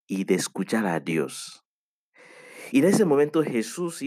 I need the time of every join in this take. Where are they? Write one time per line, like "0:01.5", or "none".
none